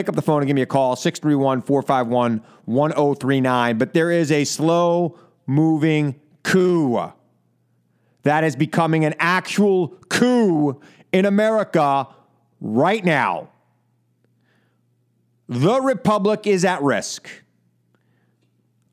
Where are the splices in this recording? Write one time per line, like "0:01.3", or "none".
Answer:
none

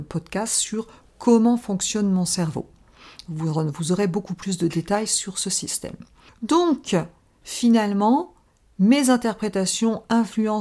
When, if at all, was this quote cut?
none

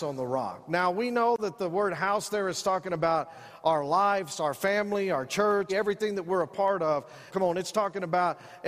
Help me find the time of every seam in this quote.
0:05.7
0:07.3

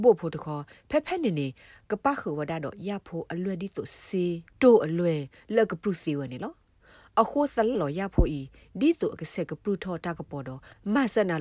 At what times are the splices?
0:07.7

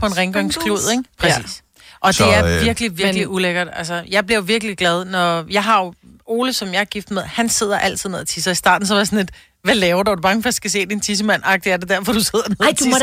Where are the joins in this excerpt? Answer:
0:01.1

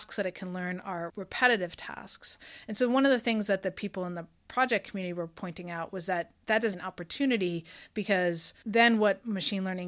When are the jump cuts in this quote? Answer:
0:06.7

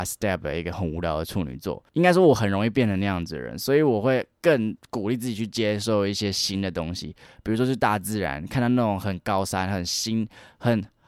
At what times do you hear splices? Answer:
0:01.9

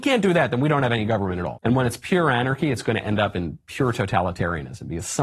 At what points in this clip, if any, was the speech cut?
0:01.6

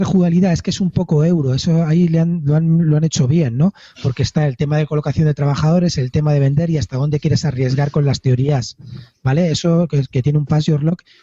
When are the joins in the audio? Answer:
none

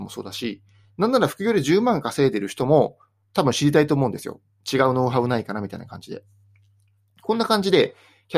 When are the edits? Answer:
none

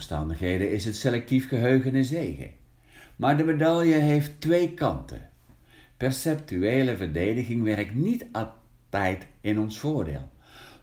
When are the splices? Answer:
none

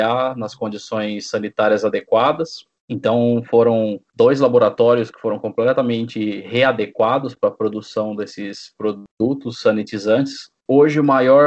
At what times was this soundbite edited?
none

